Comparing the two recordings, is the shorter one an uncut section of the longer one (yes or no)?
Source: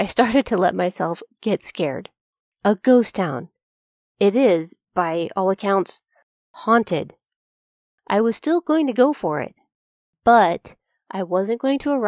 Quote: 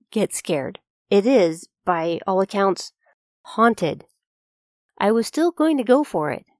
no